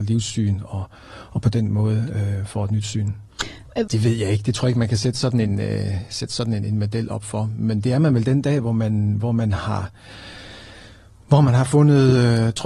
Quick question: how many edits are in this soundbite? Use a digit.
1